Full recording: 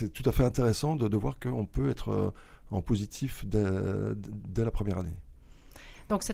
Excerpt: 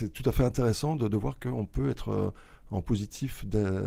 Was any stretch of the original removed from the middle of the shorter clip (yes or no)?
no